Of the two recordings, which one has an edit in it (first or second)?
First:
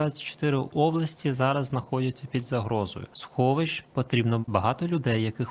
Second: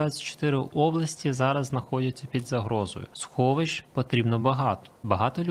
first